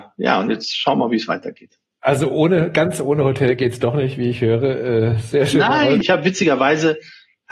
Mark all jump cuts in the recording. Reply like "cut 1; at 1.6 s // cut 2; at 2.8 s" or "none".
cut 1; at 6.0 s